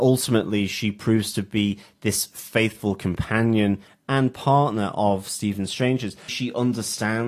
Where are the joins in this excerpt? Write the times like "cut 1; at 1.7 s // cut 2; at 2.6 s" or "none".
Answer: cut 1; at 6.3 s